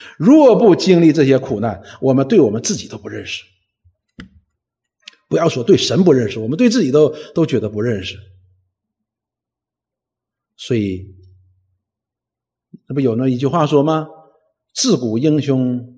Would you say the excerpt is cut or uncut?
uncut